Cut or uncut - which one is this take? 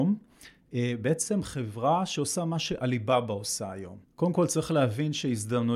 cut